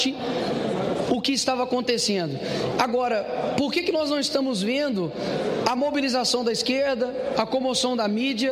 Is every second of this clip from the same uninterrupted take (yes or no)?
no